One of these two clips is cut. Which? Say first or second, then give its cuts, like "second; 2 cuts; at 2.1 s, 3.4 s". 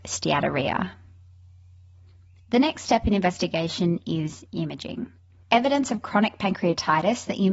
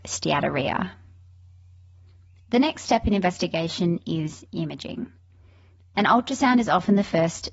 first; 1 cut; at 5.4 s